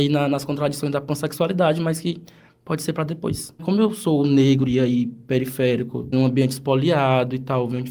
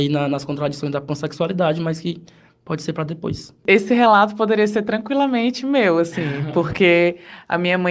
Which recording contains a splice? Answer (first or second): first